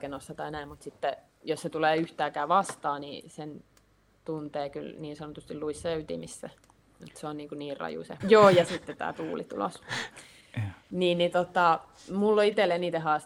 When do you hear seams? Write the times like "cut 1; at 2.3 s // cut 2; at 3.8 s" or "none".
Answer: cut 1; at 8.2 s